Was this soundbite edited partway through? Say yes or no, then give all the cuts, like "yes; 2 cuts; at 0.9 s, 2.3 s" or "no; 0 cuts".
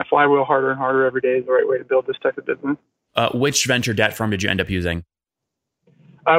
no; 0 cuts